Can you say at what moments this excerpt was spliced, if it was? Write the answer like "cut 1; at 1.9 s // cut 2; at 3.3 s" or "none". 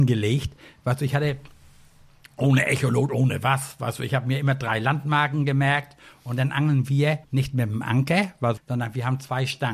cut 1; at 7.2 s // cut 2; at 8.6 s